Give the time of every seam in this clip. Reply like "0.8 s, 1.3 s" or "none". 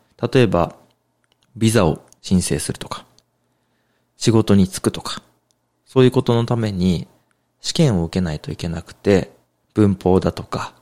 1.4 s, 9.6 s